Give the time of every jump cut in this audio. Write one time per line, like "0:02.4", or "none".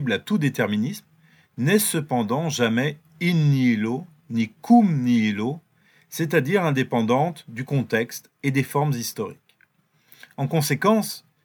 none